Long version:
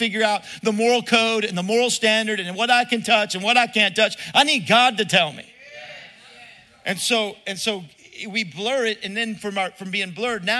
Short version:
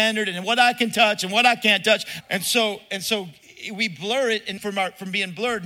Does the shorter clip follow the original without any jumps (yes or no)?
no